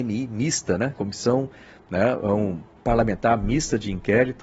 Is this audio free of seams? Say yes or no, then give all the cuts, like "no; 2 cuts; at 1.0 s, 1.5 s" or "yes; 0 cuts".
yes; 0 cuts